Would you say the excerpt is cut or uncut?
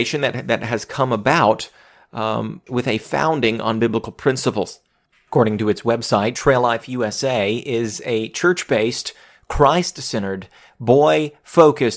uncut